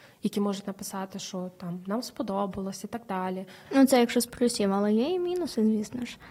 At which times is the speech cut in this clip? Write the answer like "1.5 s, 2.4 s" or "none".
3.7 s